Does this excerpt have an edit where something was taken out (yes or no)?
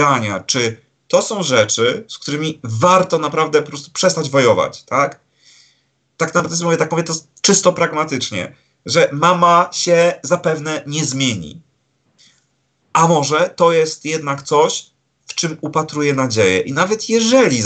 no